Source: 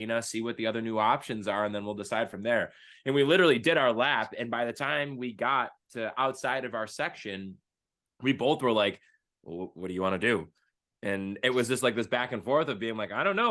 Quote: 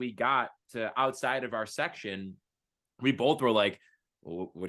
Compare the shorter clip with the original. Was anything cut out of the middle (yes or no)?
no